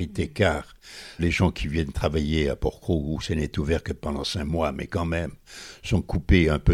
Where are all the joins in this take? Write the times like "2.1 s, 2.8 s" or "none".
1.2 s